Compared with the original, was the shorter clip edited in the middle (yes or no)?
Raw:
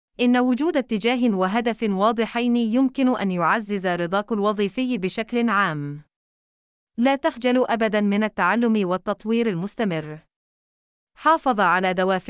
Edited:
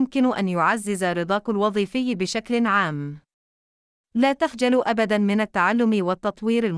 no